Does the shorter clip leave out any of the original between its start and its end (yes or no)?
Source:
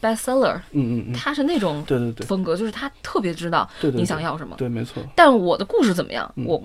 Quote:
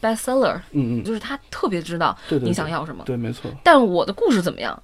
yes